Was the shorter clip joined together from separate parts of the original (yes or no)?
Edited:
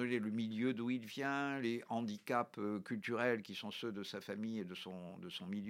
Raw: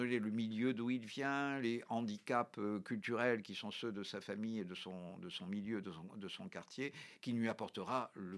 no